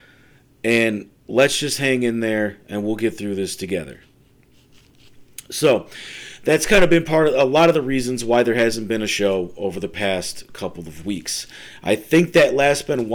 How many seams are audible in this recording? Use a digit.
1